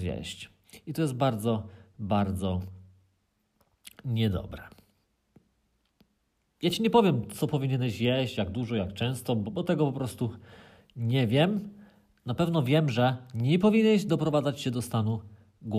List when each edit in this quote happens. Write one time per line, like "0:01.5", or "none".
0:09.5